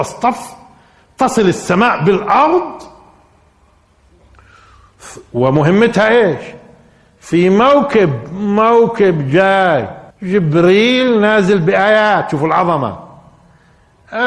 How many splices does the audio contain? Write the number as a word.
one